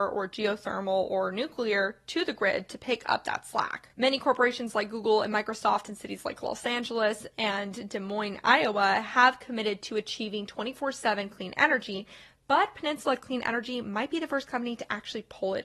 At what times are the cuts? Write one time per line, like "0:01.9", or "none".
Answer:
none